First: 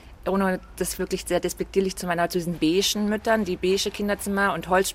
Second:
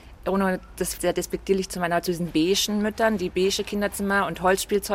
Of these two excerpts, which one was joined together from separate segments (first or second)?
second